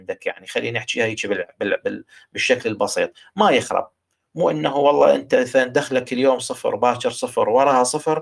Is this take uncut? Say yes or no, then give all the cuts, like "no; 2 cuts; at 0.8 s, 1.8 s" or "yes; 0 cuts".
yes; 0 cuts